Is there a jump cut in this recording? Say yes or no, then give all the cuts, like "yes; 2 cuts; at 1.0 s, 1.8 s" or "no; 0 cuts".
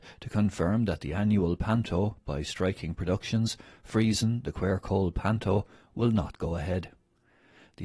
no; 0 cuts